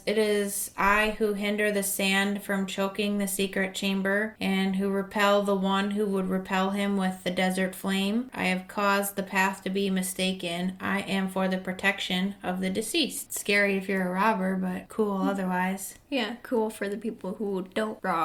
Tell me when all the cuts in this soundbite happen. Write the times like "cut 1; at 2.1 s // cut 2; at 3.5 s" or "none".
cut 1; at 8.3 s // cut 2; at 13.3 s